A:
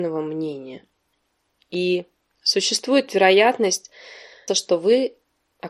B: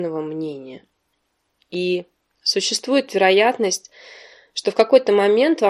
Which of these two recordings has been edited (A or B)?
A